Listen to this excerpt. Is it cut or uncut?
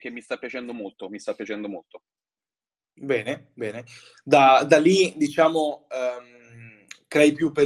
uncut